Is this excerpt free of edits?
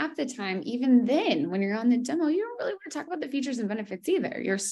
yes; 0 cuts

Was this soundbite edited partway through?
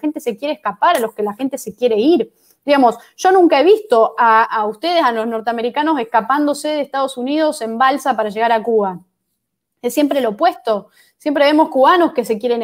yes; 1 cut; at 4.4 s

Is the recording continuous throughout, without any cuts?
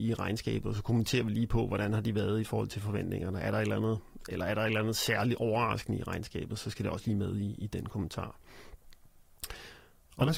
yes; 0 cuts

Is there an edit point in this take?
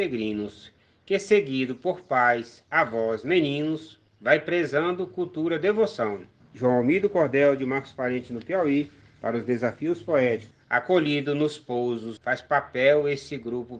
yes; 3 cuts; at 6.4 s, 10.5 s, 12.2 s

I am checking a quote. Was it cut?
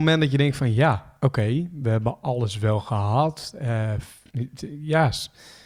no; 0 cuts

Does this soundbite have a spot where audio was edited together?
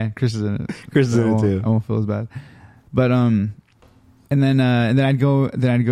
no; 0 cuts

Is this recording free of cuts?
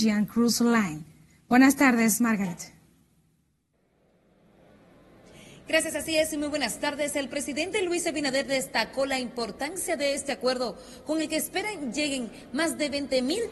yes; 0 cuts

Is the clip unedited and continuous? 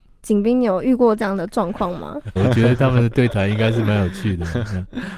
no; 1 cut; at 2.4 s

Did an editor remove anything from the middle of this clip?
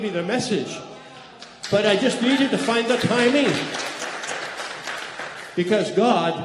no; 0 cuts

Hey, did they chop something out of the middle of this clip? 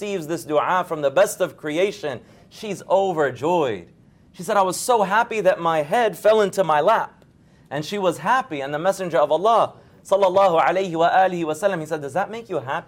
no; 0 cuts

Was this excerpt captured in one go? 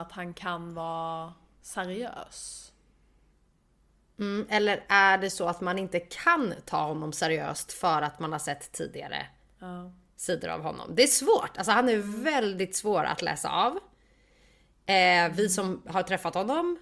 yes; 0 cuts

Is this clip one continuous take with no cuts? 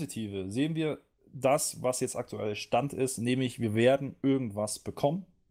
yes; 0 cuts

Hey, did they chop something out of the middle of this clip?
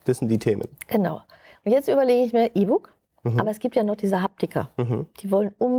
no; 0 cuts

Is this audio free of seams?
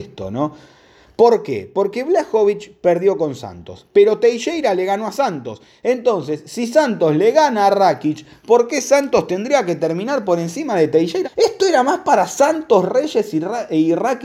no; 1 cut; at 11.2 s

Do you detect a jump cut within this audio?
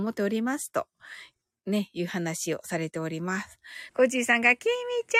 yes; 1 cut; at 3.9 s

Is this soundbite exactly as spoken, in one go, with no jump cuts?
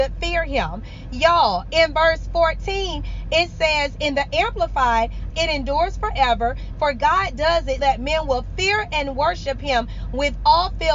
no; 3 cuts; at 5.3 s, 6.7 s, 7.8 s

